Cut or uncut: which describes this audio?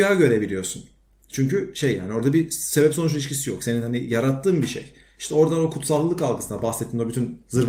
uncut